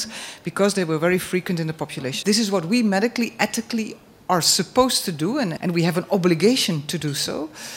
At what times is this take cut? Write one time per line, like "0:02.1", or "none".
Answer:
0:02.2
0:05.6